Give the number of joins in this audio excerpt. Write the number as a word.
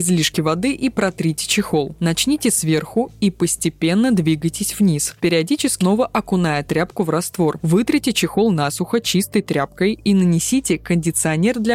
two